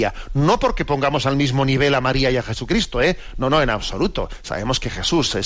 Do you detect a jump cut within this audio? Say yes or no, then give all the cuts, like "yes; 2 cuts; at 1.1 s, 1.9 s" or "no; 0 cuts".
no; 0 cuts